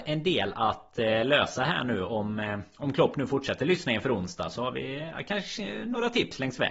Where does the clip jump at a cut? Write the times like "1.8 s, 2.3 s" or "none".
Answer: none